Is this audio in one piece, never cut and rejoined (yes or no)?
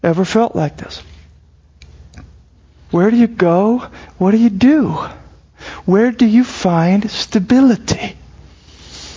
no